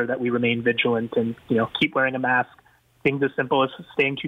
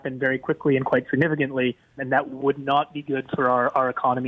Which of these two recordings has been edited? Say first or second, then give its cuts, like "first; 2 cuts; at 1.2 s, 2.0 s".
second; 1 cut; at 2.0 s